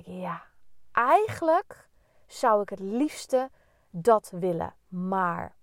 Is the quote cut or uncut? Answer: uncut